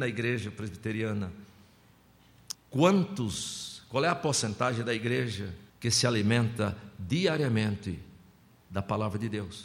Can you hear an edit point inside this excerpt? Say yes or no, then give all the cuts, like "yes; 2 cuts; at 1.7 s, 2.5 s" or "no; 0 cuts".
yes; 2 cuts; at 2.5 s, 5.7 s